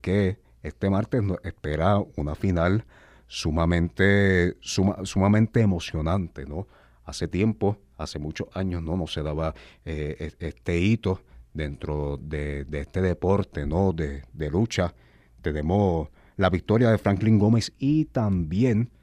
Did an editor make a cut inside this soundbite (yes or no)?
no